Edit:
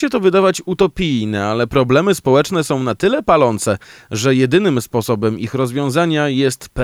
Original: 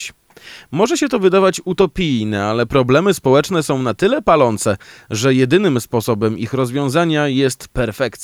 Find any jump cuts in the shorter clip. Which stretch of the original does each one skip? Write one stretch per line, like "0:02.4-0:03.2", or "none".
none

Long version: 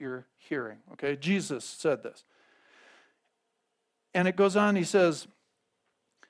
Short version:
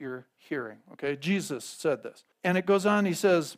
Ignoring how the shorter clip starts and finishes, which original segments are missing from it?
0:02.3-0:04.0

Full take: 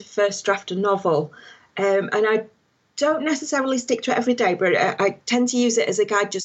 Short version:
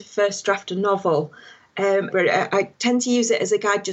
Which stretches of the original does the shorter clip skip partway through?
0:02.1-0:04.6

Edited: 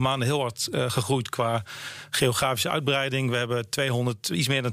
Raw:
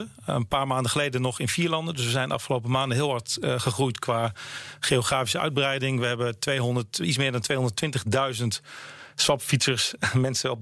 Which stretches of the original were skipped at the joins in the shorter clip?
none

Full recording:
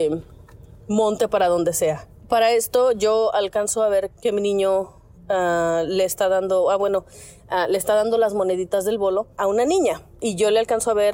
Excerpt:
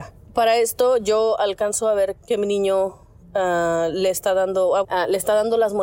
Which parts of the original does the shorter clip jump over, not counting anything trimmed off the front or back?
0:06.8-0:07.4

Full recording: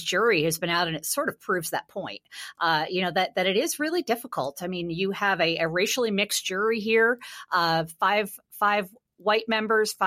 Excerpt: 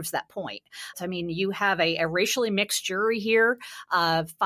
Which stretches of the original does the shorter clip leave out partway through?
0:02.5-0:04.5

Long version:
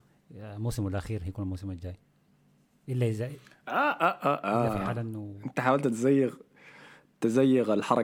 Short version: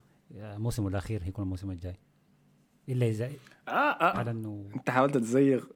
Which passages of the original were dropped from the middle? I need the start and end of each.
0:04.1-0:04.8

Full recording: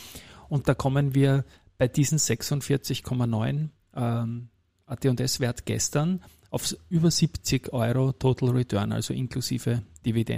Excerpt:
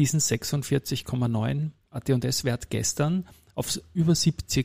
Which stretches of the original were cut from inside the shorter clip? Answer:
0:03.8-0:04.8

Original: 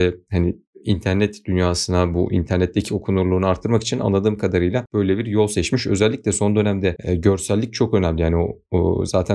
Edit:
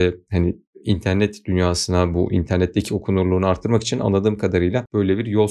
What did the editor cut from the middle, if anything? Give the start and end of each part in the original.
none

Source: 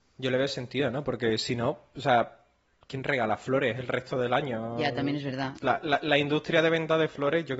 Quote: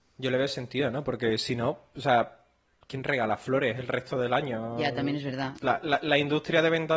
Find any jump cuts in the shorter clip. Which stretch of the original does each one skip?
none

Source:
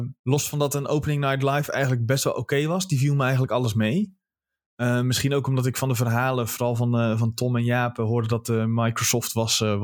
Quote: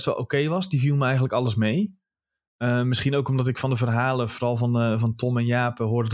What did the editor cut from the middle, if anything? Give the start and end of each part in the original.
none

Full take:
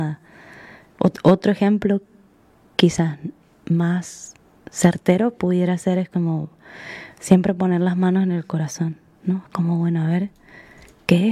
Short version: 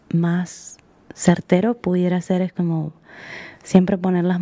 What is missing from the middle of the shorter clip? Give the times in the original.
none

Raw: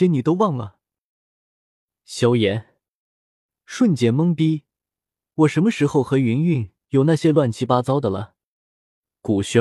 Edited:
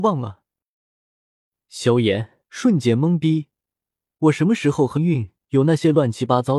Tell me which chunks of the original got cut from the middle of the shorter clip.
0:02.8-0:03.6
0:06.1-0:06.4

